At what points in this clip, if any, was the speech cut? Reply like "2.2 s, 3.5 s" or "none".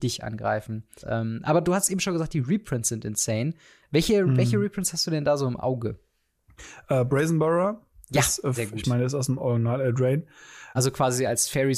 1.0 s, 8.6 s, 10.7 s